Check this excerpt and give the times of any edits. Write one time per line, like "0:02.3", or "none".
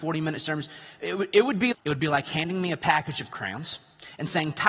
0:01.7